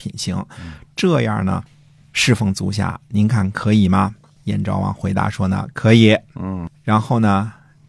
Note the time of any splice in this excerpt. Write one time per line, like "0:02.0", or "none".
none